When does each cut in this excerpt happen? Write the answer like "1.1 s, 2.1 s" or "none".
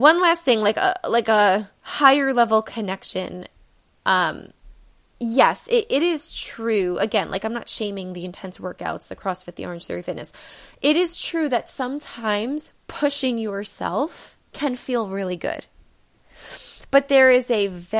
none